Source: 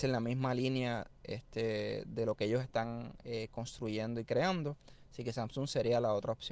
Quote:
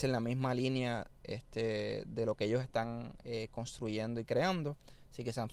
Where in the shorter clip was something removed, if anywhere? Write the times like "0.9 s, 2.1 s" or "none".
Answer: none